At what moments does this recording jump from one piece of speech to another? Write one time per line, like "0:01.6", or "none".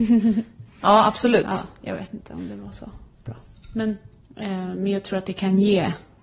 0:04.2